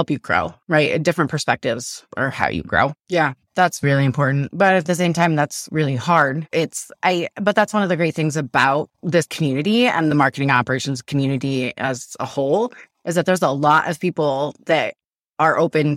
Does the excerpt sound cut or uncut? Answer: cut